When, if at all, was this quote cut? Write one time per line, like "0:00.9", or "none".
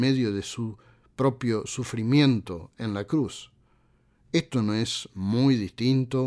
none